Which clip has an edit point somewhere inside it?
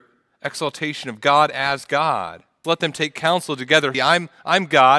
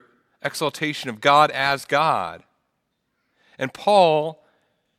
first; 2 cuts; at 2.6 s, 3.9 s

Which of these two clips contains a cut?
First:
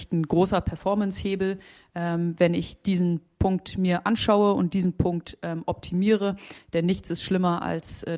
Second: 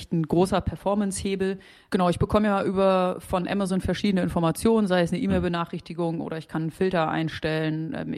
second; 1 cut; at 1.9 s

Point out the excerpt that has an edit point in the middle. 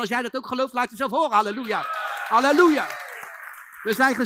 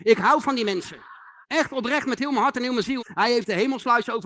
second; 2 cuts; at 1.4 s, 3.0 s

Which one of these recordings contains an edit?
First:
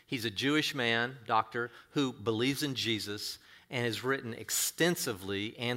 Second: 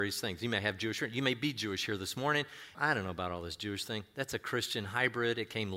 second; 1 cut; at 2.7 s

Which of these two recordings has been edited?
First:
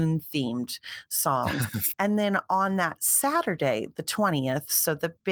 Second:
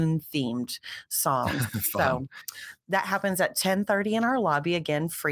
first; 1 cut; at 1.9 s

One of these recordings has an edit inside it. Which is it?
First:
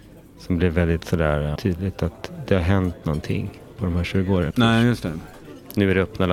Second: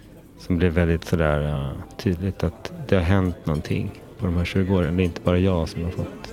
first; 2 cuts; at 1.6 s, 4.5 s

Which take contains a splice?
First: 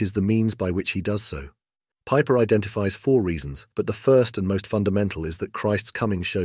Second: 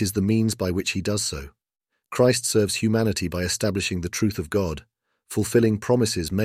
first; 2 cuts; at 1.9 s, 3.7 s

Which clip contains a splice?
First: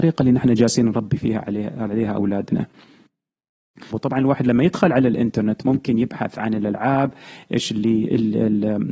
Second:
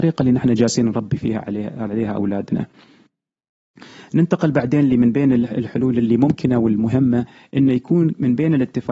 first; 1 cut; at 3.9 s

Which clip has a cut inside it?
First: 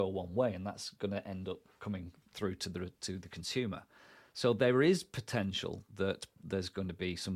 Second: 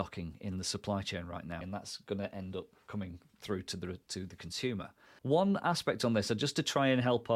second; 2 cuts; at 1.6 s, 5.2 s

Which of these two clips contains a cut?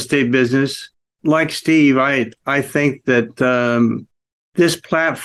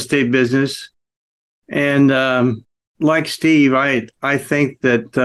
first; 1 cut; at 1.1 s

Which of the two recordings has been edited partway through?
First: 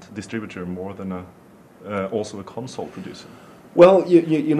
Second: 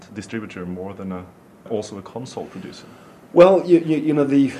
second; 1 cut; at 1.7 s

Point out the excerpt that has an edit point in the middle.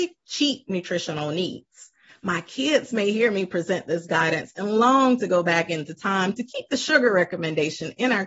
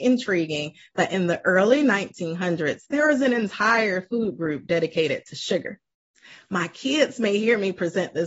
first; 1 cut; at 2.1 s

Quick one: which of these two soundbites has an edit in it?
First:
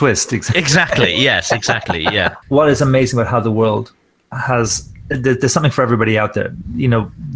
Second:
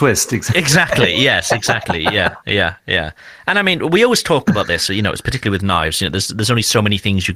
first; 1 cut; at 2.4 s

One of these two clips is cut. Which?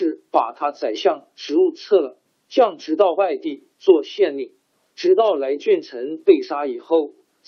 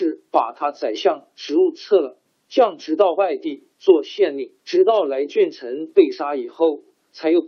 second; 1 cut; at 4.6 s

